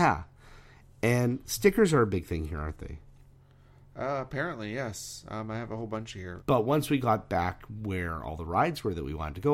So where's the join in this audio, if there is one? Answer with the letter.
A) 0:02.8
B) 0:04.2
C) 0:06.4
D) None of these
C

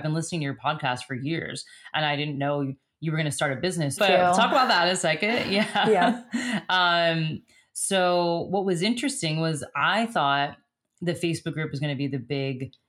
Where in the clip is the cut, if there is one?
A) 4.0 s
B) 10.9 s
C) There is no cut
A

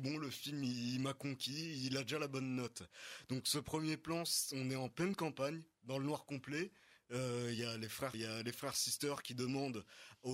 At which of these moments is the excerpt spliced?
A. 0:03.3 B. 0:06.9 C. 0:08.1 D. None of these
C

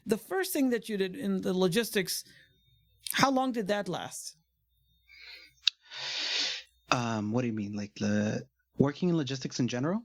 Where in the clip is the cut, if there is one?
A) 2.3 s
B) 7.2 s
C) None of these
C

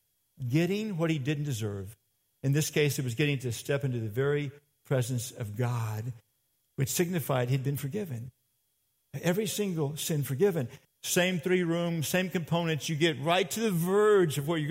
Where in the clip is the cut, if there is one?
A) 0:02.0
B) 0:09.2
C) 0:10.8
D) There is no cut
C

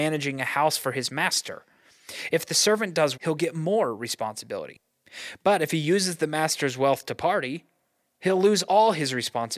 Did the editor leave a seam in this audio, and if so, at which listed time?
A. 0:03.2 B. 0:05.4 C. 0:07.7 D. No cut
A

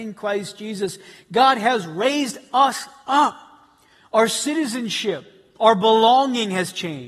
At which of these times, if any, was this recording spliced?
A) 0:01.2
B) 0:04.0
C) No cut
C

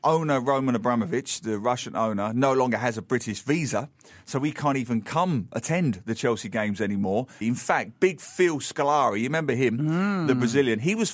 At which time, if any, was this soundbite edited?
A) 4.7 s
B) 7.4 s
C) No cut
B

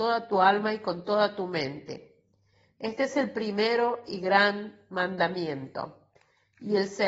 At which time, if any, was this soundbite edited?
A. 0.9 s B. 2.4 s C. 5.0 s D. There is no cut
D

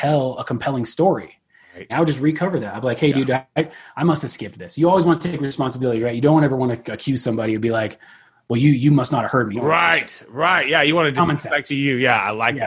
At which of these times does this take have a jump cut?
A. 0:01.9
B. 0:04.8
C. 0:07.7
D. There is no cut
A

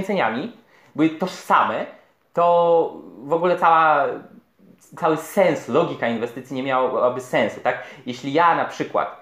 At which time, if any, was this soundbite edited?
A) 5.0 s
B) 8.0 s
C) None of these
A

